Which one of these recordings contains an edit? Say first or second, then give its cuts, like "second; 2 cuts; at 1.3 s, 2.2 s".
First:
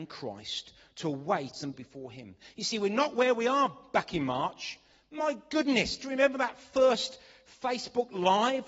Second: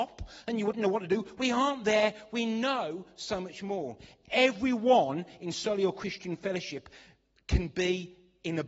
first; 1 cut; at 1.7 s